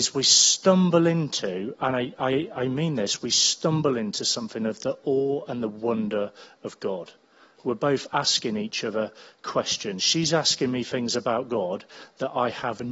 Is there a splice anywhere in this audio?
no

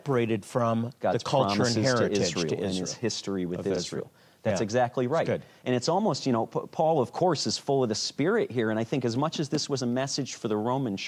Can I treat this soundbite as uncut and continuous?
yes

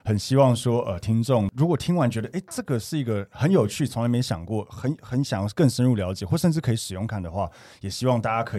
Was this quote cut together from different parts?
yes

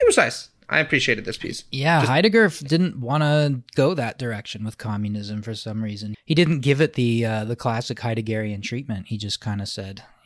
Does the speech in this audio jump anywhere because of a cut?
yes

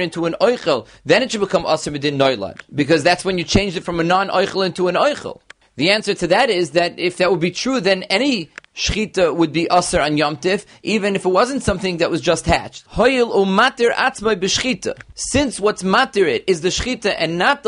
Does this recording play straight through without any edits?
no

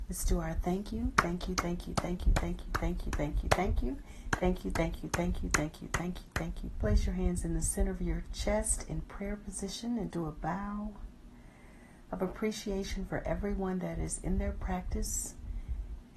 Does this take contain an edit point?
yes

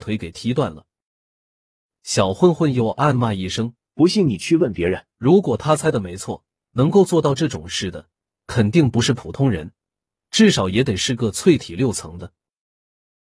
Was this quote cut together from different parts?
yes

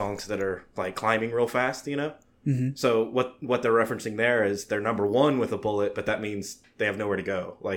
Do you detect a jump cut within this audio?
no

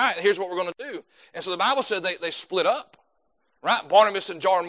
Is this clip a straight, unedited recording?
yes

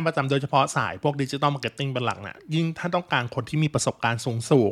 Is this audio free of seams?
yes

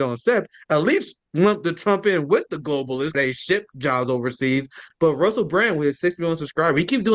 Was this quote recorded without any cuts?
no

